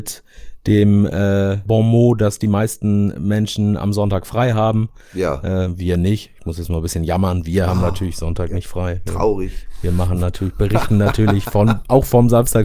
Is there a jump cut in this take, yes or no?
yes